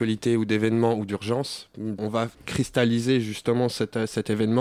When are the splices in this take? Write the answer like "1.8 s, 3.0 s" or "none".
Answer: 2.0 s